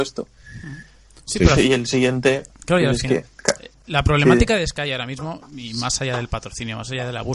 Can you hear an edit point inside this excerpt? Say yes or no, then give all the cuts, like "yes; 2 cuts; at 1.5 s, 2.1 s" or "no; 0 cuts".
no; 0 cuts